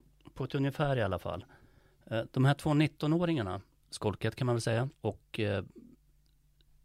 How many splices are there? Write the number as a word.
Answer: two